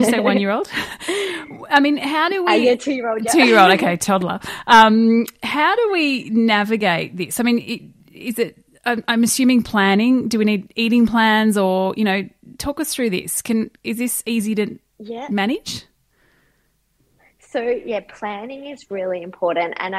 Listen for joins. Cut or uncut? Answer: uncut